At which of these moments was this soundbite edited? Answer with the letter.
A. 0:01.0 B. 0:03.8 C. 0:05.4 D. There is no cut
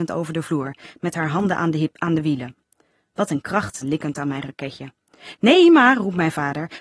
B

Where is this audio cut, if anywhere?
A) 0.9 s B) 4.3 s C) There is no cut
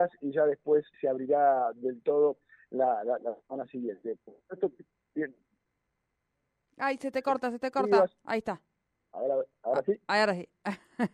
A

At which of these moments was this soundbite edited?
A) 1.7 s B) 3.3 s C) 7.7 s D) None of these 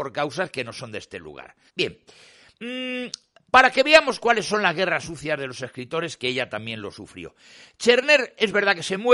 A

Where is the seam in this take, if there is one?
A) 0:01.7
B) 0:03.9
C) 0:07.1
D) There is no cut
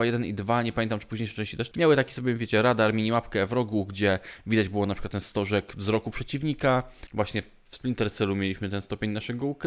A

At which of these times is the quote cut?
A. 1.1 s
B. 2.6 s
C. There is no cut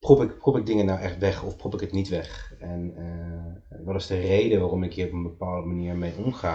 C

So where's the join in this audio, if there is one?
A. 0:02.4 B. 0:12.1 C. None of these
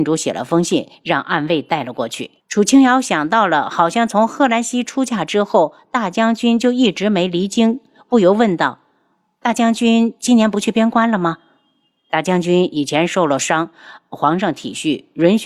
A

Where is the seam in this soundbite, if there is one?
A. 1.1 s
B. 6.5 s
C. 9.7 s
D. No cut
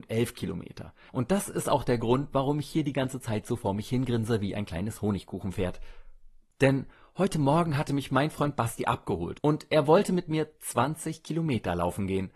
A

